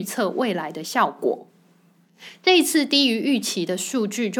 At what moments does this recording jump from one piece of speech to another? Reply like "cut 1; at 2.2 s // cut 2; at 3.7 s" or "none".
none